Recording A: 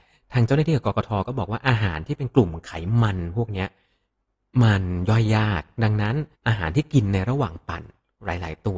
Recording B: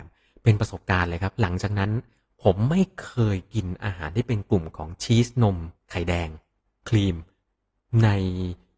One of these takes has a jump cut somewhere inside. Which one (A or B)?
A